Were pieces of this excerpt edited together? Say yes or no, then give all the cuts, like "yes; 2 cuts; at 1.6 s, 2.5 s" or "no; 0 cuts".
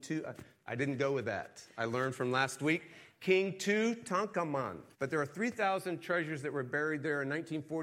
yes; 1 cut; at 4.9 s